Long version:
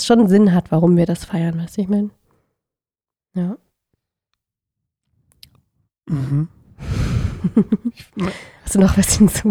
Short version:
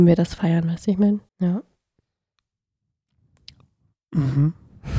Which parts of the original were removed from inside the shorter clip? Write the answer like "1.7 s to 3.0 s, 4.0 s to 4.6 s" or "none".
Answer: 2.2 s to 3.2 s

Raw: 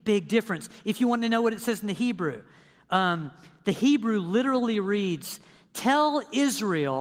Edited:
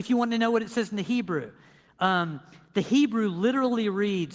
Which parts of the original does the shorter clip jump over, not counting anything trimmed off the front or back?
none

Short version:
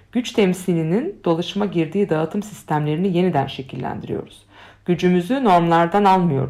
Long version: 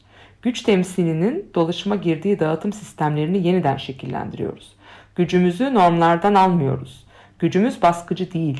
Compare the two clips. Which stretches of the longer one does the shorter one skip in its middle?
none

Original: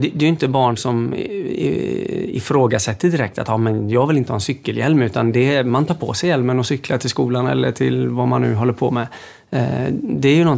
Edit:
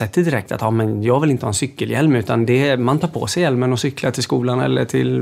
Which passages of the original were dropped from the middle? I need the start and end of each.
none

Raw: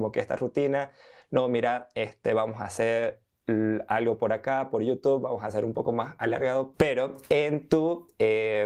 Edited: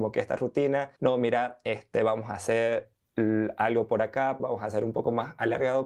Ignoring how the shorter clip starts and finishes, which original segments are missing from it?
1.0 s to 1.3 s, 4.7 s to 5.2 s

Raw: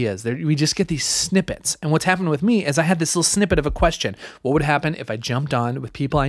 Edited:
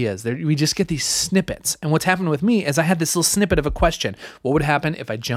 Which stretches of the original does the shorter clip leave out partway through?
none

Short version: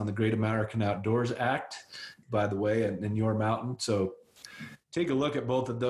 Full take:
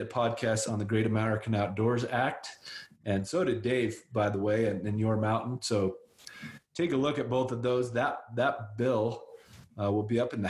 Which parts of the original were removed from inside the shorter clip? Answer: 3.0 s to 4.1 s

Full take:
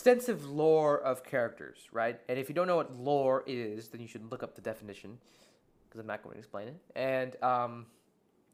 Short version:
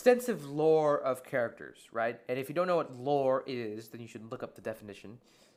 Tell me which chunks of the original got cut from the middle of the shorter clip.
none

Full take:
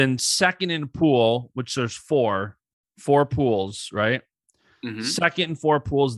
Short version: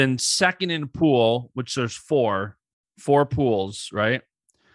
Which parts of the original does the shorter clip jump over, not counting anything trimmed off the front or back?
none

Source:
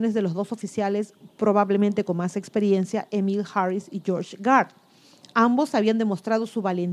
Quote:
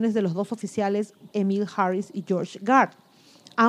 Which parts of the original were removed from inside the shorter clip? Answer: 1.3 s to 3.1 s

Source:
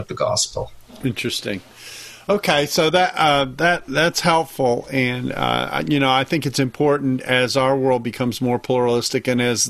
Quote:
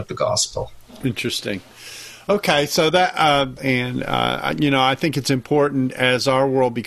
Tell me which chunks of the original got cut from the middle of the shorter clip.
3.6 s to 4.9 s

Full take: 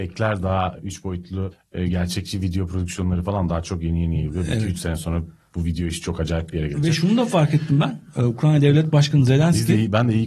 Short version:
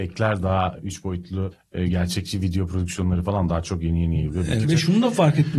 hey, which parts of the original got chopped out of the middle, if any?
4.6 s to 6.8 s

